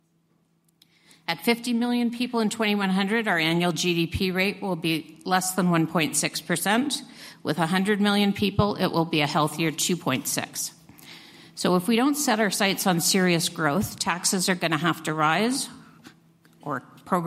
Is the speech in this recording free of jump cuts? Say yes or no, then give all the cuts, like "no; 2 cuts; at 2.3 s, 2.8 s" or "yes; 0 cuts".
yes; 0 cuts